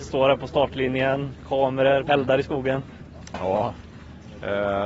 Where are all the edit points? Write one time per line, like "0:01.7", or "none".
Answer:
0:02.1